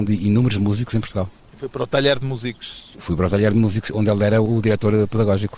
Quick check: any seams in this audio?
no; 0 cuts

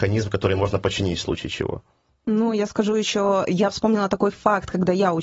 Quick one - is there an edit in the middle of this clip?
no; 0 cuts

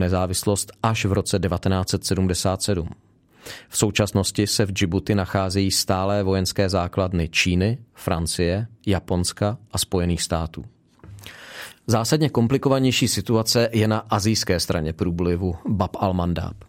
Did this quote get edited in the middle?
no; 0 cuts

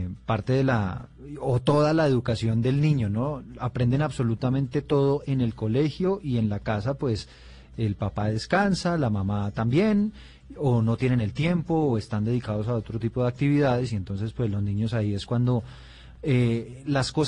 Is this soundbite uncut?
yes; 0 cuts

